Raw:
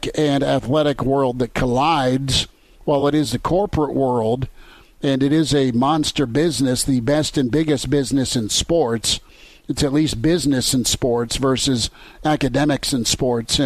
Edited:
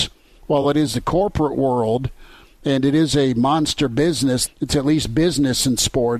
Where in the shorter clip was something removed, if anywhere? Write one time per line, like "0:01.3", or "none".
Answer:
0:04.5